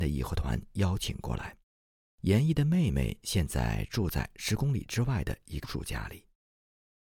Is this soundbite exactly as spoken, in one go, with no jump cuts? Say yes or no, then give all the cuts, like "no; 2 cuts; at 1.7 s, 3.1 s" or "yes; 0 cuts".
no; 2 cuts; at 2.1 s, 5.6 s